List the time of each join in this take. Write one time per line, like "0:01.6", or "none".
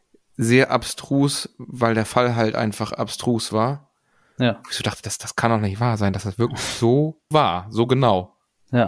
0:04.4
0:07.3